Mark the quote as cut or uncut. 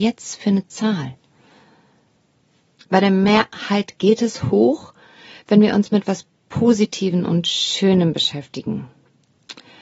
cut